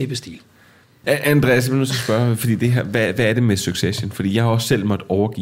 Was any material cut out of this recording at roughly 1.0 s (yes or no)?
yes